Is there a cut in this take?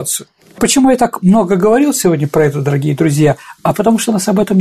no; 0 cuts

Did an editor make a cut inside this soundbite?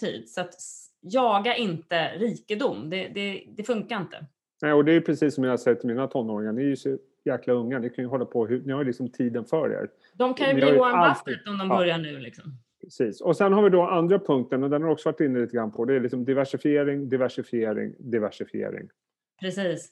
no; 0 cuts

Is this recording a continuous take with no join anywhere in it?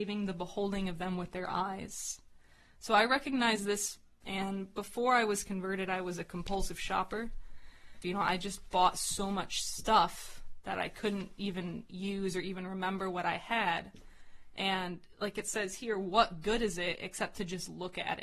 no; 2 cuts; at 4.2 s, 8.0 s

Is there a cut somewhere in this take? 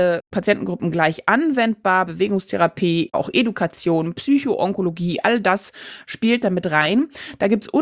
no; 0 cuts

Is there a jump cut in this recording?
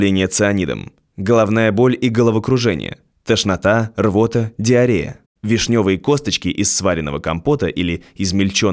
yes; 1 cut; at 5.3 s

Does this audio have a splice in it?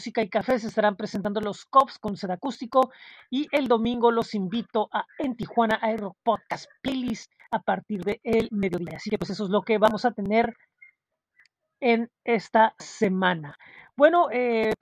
no; 0 cuts

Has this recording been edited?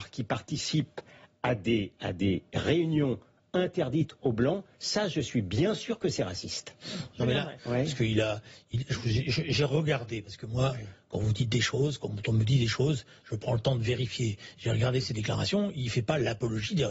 yes; 1 cut; at 7.6 s

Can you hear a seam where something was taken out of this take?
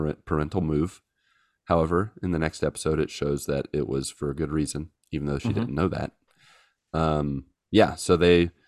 no; 0 cuts

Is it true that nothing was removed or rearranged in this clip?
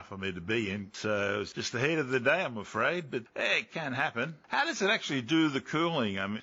yes; 0 cuts

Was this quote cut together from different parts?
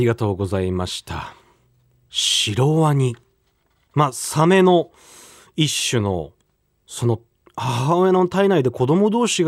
no; 0 cuts

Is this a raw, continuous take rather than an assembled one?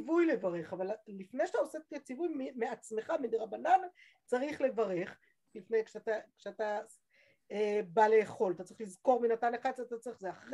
no; 1 cut; at 5.5 s

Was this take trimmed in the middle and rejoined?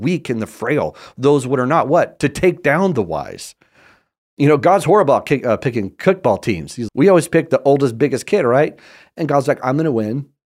yes; 1 cut; at 6.9 s

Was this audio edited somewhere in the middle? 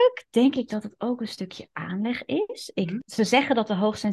yes; 1 cut; at 3.0 s

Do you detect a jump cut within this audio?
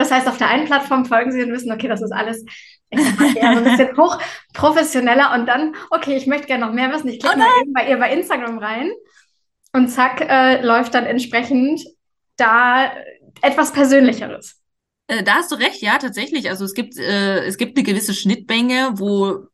no; 0 cuts

